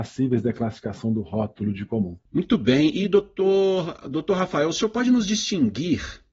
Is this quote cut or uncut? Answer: cut